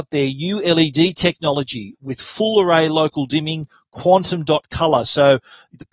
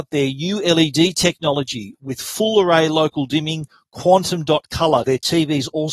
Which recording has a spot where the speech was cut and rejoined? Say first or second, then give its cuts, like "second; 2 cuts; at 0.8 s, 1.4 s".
second; 1 cut; at 5.0 s